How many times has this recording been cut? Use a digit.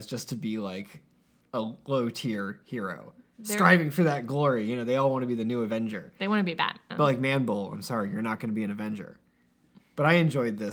0